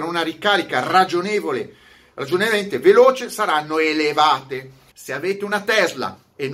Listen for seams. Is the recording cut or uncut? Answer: cut